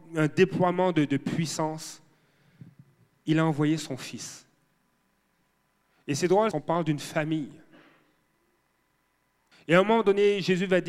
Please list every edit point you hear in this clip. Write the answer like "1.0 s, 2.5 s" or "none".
6.5 s, 9.5 s